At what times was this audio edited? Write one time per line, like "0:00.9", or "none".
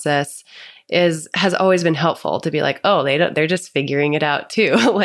none